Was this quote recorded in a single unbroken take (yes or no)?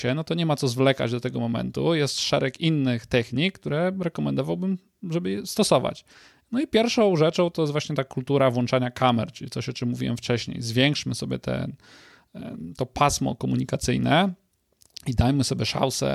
yes